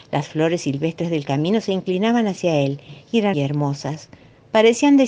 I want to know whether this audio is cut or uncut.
cut